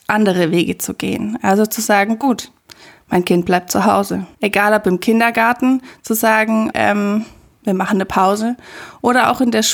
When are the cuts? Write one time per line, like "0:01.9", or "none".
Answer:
0:04.3
0:06.7